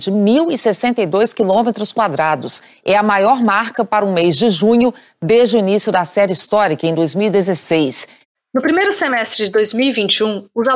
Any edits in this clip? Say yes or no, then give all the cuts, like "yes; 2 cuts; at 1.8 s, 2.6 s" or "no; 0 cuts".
no; 0 cuts